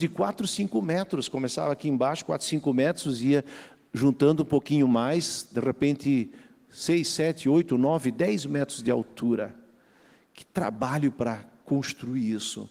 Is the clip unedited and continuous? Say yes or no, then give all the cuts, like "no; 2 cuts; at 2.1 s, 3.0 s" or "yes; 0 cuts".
yes; 0 cuts